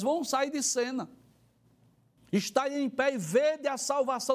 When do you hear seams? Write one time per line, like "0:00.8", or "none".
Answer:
0:02.2